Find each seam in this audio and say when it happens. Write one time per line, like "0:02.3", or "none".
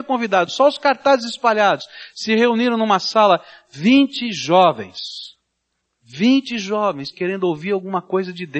none